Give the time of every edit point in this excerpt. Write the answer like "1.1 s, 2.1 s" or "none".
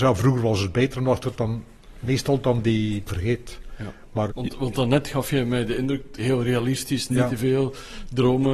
3.1 s, 4.3 s, 6.2 s